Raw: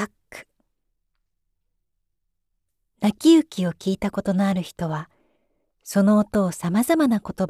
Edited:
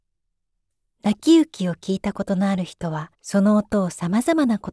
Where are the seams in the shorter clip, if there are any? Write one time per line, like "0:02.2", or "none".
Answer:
0:03.1